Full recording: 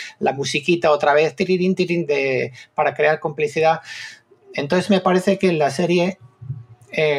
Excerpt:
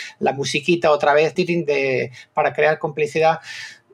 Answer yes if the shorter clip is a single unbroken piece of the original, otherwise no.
no